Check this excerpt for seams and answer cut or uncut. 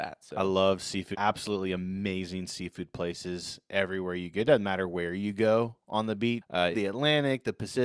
cut